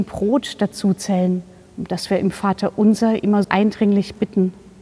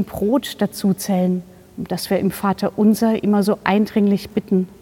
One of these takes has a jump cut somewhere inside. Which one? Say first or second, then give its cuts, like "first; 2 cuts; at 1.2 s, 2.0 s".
first; 1 cut; at 3.4 s